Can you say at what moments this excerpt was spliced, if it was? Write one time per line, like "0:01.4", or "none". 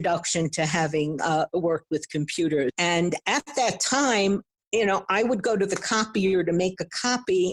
0:02.7